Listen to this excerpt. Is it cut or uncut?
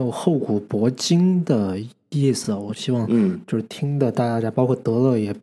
uncut